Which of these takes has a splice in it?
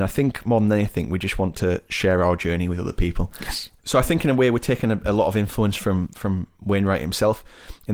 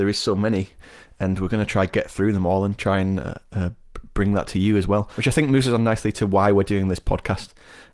first; 1 cut; at 3.8 s

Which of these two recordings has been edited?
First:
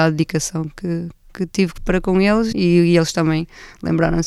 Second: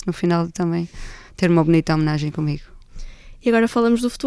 first; 1 cut; at 2.5 s

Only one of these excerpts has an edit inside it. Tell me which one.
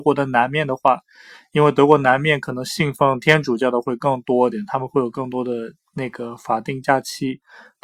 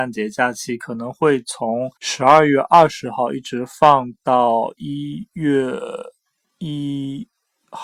second; 1 cut; at 2.0 s

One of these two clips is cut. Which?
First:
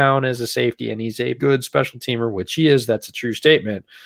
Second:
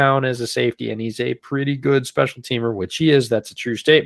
first; 1 cut; at 1.4 s

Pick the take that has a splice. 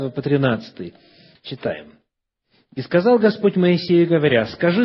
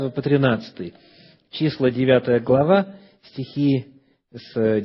first; 1 cut; at 1.4 s

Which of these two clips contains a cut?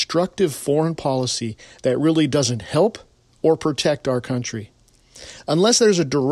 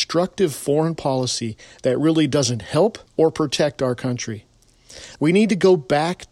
second; 2 cuts; at 3.1 s, 5.2 s

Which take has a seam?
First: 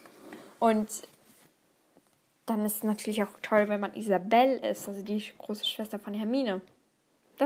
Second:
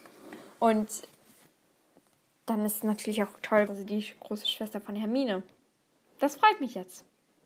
second; 1 cut; at 3.7 s

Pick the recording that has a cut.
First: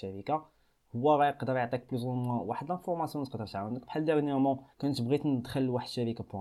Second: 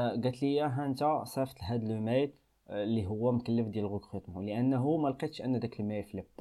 first; 1 cut; at 4.7 s

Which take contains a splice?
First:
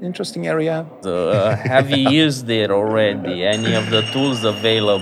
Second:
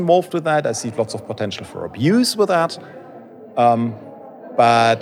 first; 1 cut; at 1.0 s

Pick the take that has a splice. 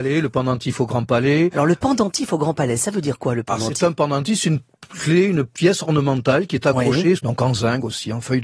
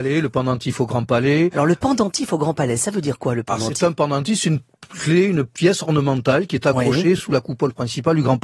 first; 1 cut; at 7.2 s

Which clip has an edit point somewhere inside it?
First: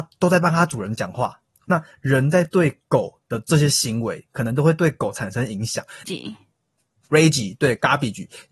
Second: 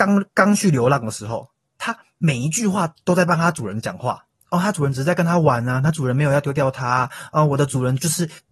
first; 2 cuts; at 1.6 s, 6.0 s

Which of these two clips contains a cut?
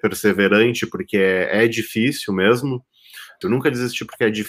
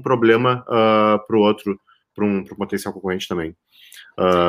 first; 1 cut; at 3.4 s

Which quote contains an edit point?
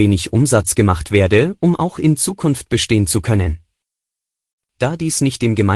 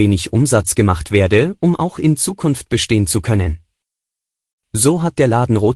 first; 1 cut; at 4.6 s

